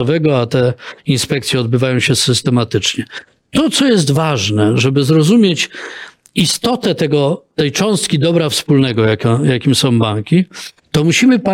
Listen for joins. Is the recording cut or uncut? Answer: uncut